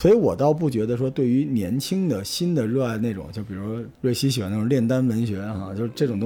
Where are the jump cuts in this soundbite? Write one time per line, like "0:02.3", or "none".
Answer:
0:03.9